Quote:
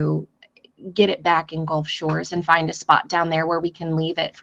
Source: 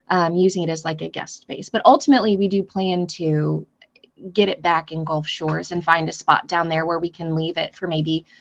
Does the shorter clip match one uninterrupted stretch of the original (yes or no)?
yes